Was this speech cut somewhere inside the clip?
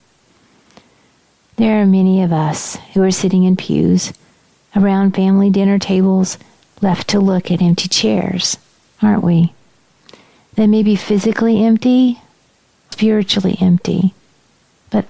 yes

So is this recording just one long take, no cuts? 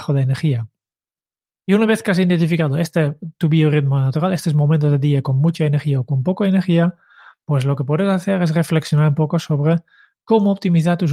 yes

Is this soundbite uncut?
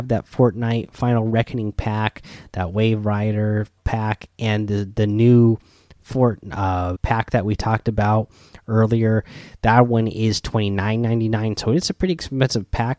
no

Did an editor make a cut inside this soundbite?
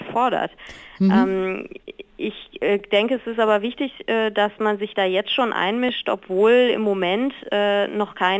no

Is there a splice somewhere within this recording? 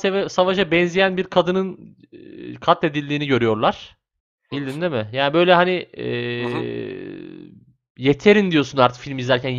yes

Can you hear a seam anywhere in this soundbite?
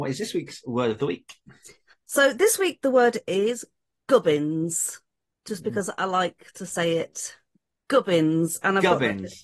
no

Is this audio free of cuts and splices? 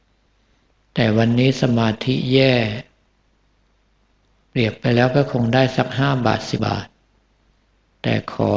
no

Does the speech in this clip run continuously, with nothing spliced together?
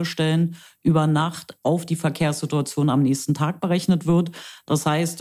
yes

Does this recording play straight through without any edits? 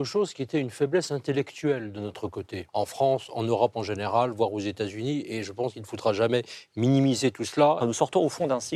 no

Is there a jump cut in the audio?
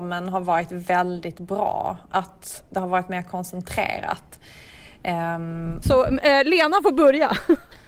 yes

